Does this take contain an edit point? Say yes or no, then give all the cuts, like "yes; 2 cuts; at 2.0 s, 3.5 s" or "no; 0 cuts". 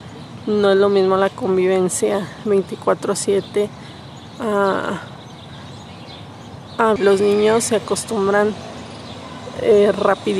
yes; 1 cut; at 7.0 s